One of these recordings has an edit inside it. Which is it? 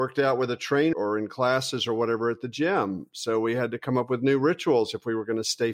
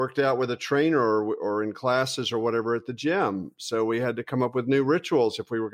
first; 1 cut; at 0.9 s

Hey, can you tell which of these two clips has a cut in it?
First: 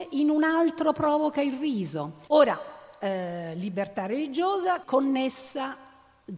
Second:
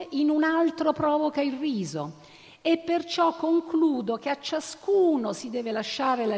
first; 2 cuts; at 2.3 s, 4.8 s

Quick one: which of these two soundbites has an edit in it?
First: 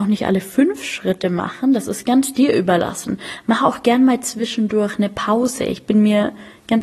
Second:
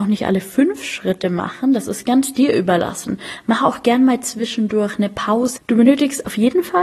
second; 1 cut; at 5.6 s

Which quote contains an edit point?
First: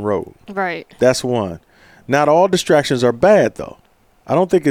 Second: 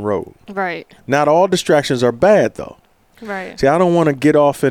second; 2 cuts; at 1.0 s, 3.0 s

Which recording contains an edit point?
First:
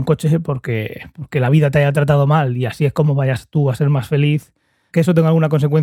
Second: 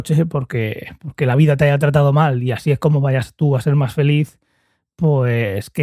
first; 1 cut; at 4.9 s

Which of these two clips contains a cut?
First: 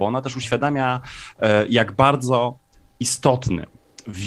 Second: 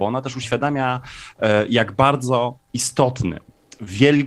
second; 1 cut; at 2.7 s

